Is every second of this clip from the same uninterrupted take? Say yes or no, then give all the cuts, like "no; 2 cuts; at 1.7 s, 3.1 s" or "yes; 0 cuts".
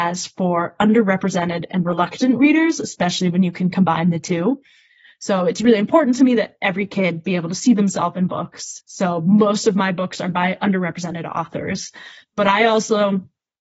yes; 0 cuts